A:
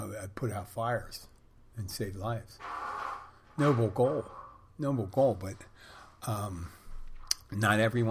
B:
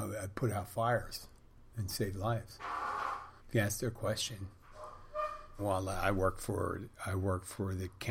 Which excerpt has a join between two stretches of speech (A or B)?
B